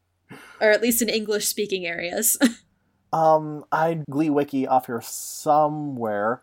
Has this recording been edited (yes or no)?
yes